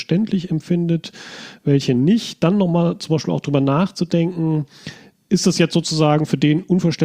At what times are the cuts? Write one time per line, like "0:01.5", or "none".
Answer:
none